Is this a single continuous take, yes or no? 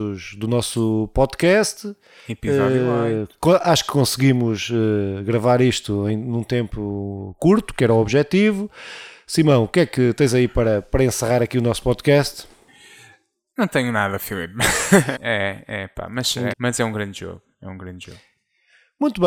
no